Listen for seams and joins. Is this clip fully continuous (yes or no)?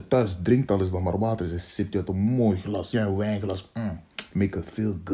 no